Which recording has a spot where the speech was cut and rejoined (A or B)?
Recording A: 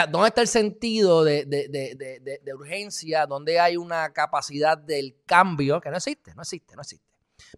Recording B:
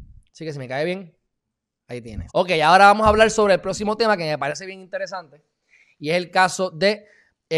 B